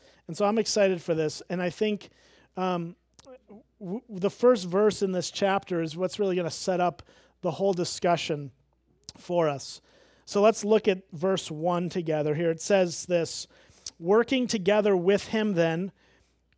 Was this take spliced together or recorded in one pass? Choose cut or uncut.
uncut